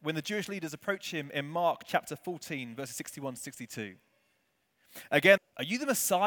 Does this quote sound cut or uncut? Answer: cut